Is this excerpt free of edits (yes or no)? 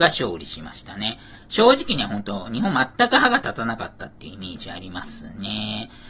yes